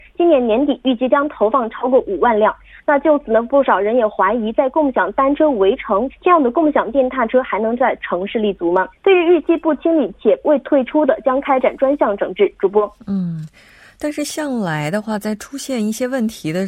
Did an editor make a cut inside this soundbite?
yes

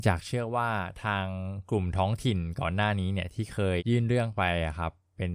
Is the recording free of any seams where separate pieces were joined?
no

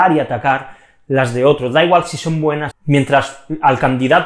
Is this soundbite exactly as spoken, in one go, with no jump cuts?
no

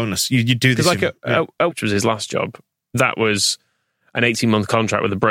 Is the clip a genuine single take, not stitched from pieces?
no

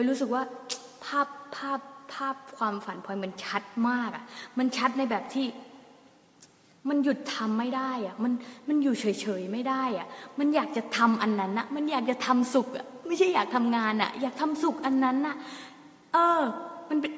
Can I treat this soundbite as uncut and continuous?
yes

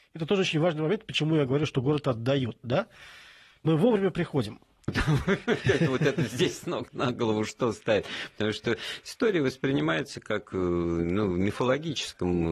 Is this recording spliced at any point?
yes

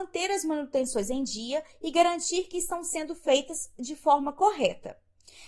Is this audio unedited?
yes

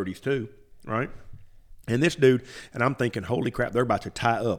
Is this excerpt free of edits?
yes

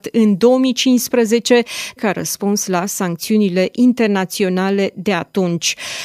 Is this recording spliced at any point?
yes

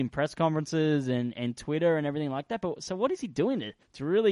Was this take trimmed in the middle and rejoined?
no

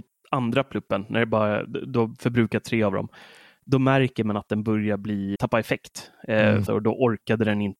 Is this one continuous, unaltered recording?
no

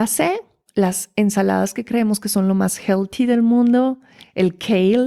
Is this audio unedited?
yes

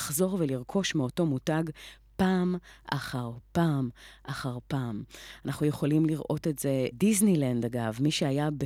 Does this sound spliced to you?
yes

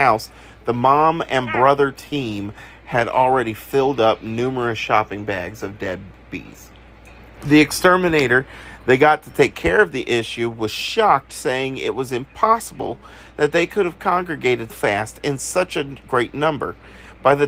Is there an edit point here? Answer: yes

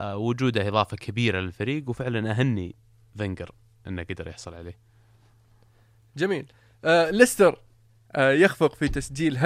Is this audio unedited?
yes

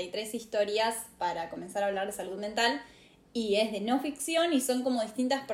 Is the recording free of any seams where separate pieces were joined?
yes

